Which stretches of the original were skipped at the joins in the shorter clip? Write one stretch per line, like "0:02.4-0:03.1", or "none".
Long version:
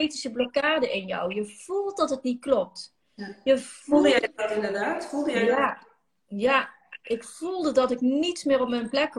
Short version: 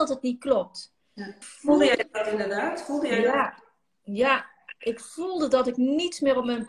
0:03.4-0:03.7